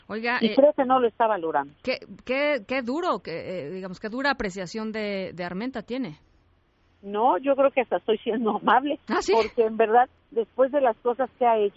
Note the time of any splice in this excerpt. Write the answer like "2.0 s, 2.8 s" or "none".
none

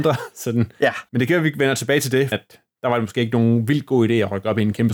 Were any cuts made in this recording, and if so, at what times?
1.1 s, 2.3 s

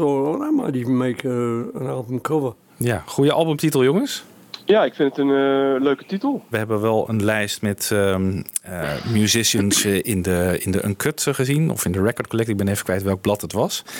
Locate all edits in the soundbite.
6.5 s

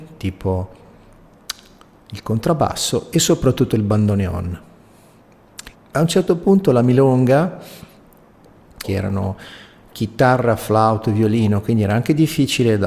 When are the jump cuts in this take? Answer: 5.7 s, 8.8 s

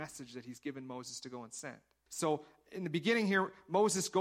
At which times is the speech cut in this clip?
2.1 s

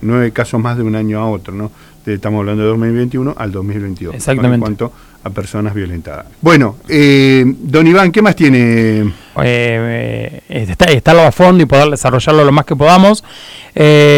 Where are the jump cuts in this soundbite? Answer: 6.3 s, 9.4 s, 10.4 s

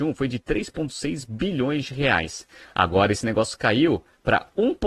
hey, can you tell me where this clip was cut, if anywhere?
none

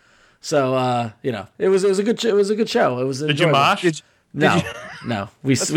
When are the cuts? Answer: none

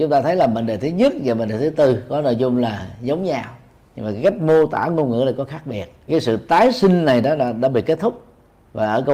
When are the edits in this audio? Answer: 6.1 s

